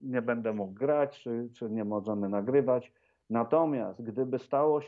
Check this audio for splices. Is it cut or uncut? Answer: uncut